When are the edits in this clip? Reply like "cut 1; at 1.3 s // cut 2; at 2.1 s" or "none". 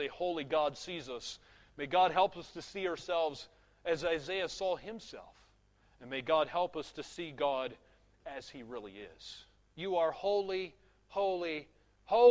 cut 1; at 9.7 s